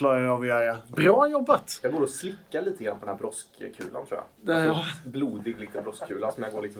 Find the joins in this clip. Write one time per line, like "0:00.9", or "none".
none